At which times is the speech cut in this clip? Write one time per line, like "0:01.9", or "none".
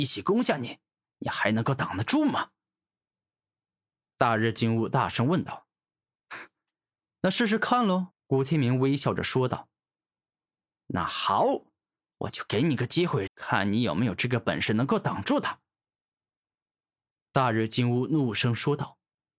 0:08.1
0:13.3

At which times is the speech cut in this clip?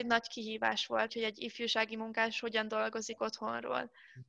0:01.1

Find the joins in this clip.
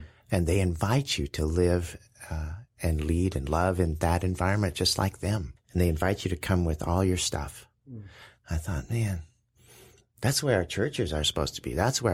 0:05.6

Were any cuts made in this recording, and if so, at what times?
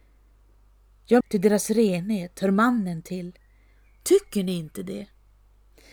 0:01.2

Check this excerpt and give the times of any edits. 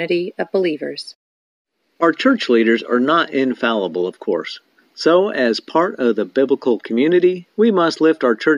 none

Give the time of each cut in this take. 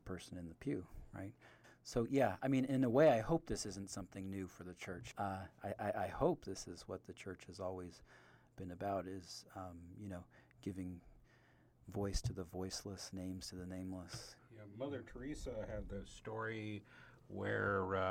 none

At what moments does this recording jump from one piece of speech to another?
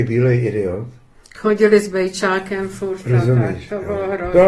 none

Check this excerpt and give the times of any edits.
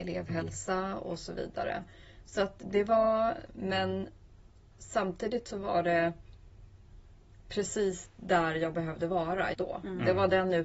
0:03.5
0:09.5

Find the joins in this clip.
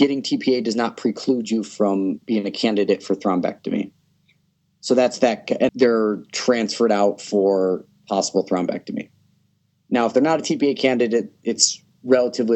0:05.7

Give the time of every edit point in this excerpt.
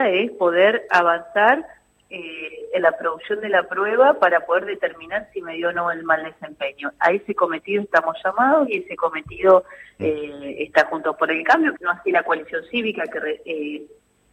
0:10.0
0:11.7

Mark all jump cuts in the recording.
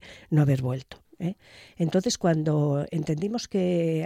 0:01.0

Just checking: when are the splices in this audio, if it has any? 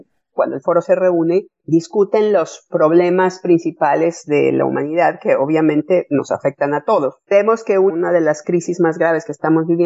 none

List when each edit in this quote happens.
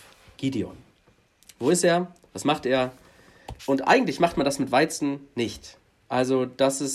0:03.6

